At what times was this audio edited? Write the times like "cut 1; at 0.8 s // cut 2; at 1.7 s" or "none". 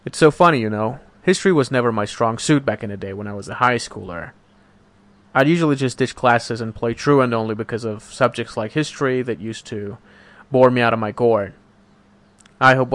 none